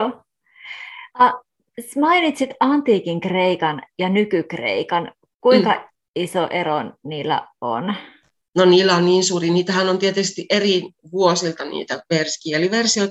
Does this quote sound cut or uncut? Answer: uncut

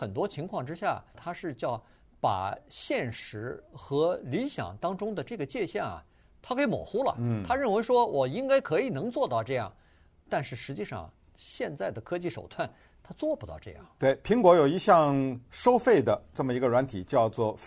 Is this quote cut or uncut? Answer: cut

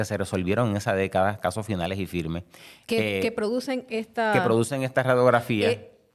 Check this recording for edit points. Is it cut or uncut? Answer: uncut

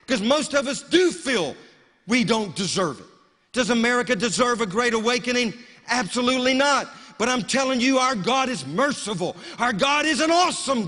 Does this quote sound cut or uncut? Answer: uncut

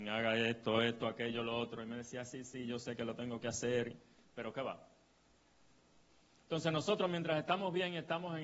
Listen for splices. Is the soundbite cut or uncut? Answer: uncut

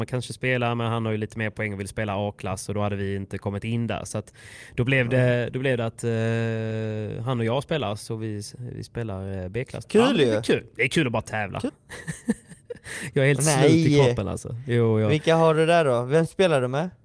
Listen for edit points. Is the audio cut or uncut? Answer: cut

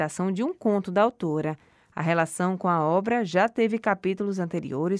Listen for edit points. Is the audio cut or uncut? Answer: uncut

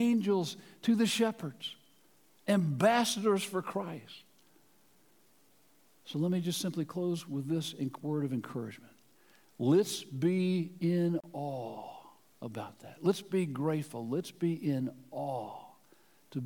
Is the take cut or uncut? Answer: uncut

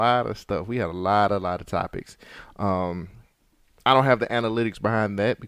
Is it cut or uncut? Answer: uncut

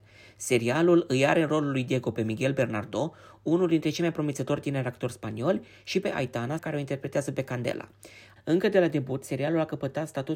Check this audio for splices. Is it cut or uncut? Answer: cut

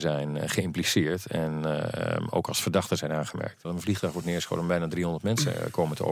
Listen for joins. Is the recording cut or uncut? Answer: cut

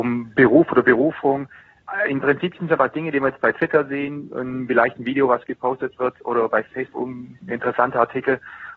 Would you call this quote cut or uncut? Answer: uncut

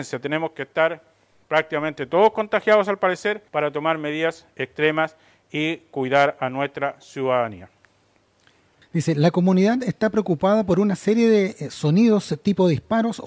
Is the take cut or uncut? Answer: cut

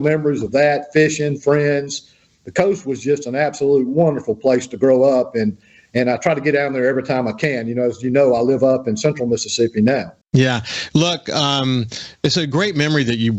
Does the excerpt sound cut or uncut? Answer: cut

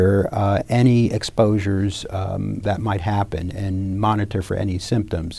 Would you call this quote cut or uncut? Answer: cut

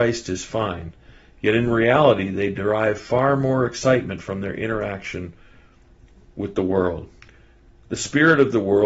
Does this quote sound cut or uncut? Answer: uncut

